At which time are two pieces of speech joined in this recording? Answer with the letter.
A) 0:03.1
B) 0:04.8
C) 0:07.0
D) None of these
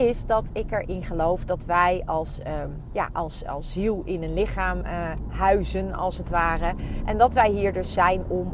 D